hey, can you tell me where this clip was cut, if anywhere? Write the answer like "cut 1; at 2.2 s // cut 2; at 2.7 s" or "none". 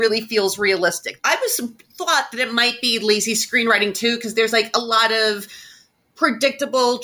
cut 1; at 1.2 s